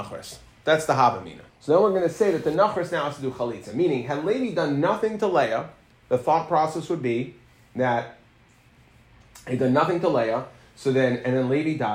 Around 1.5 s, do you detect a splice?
yes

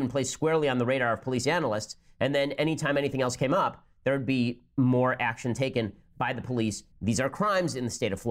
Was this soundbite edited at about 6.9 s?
yes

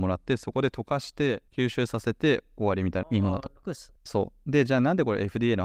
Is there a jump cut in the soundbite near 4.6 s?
no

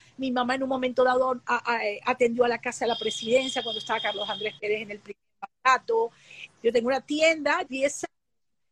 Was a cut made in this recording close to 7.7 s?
yes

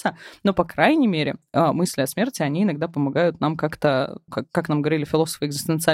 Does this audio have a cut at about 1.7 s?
no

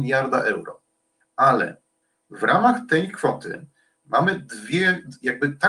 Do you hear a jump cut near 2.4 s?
no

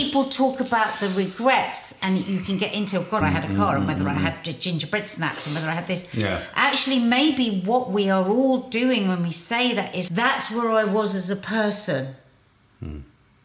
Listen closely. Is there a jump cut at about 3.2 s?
yes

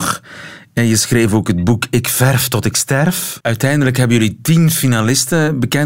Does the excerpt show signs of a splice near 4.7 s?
no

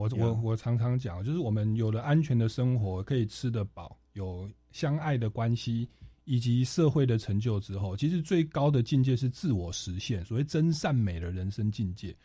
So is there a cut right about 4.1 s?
no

